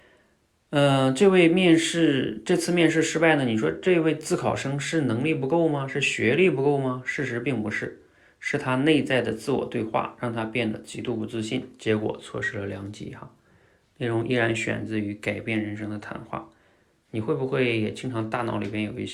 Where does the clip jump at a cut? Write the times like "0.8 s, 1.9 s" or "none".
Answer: 17.0 s